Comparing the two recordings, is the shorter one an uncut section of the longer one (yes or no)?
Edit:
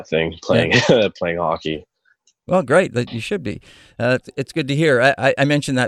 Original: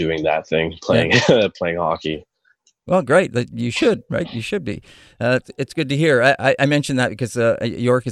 no